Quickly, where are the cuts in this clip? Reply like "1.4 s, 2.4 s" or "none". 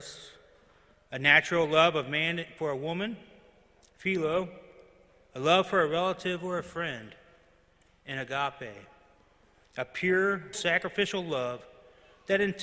10.5 s